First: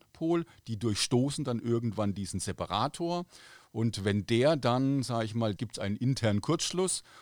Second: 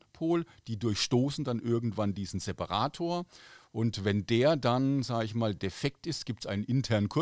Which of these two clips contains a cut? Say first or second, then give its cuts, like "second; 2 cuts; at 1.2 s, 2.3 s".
first; 1 cut; at 5.6 s